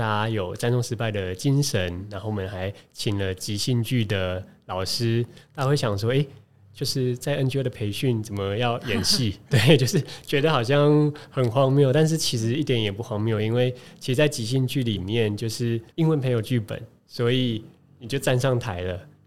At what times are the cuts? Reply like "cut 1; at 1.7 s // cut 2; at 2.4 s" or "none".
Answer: cut 1; at 15.9 s

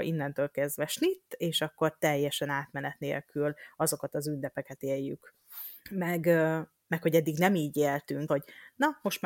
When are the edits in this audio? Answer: cut 1; at 5.8 s // cut 2; at 8.3 s

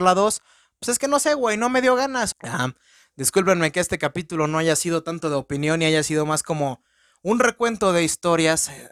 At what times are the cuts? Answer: cut 1; at 2.3 s

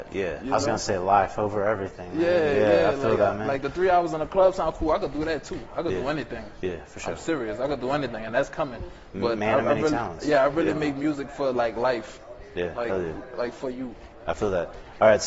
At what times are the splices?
none

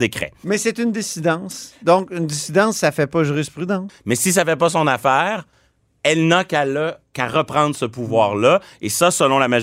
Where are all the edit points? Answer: cut 1; at 3.9 s

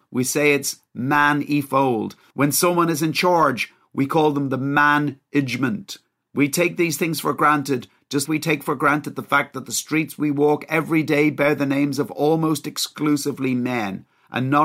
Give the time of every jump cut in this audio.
cut 1; at 8.3 s

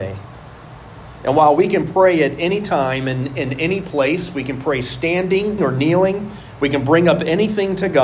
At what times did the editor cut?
cut 1; at 5.6 s

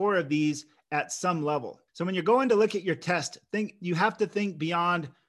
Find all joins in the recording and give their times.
cut 1; at 1.9 s

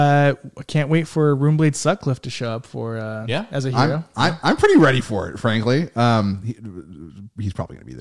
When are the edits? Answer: none

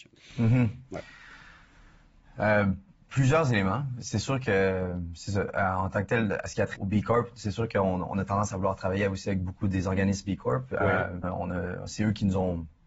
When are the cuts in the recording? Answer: cut 1; at 6.8 s // cut 2; at 11.2 s

